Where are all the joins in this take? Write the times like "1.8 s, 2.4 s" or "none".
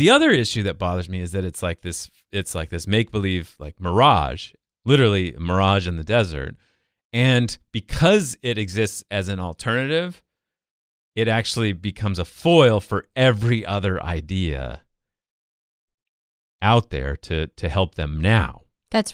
none